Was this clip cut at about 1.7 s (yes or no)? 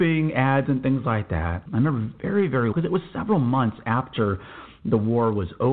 yes